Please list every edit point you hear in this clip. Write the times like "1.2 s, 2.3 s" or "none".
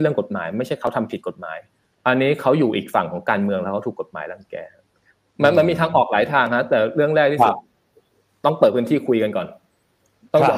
none